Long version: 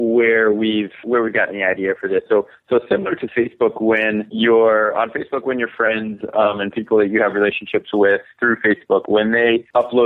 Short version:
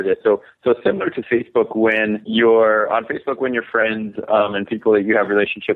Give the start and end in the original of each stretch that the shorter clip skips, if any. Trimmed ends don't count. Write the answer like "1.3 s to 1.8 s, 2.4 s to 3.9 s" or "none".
none